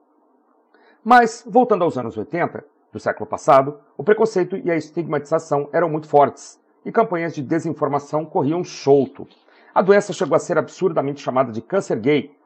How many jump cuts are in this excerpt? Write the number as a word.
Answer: zero